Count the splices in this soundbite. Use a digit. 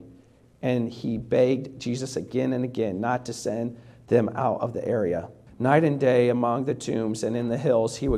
1